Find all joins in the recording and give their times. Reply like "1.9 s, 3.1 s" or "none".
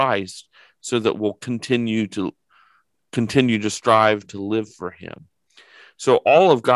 none